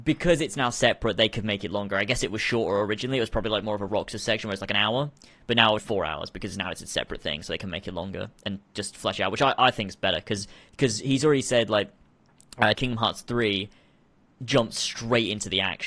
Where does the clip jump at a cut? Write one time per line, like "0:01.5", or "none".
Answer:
0:05.8
0:12.7